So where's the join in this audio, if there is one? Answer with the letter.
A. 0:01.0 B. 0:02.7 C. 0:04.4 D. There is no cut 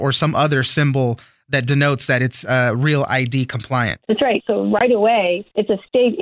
C